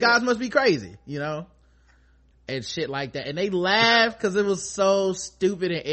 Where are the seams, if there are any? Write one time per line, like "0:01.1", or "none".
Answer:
0:02.3

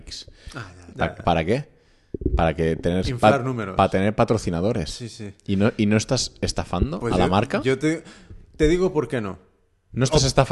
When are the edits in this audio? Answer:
0:00.9

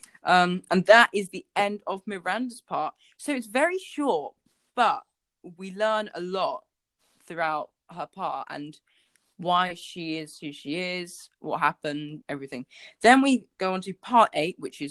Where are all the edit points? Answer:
0:12.2

